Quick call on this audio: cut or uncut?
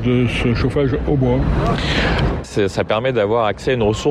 cut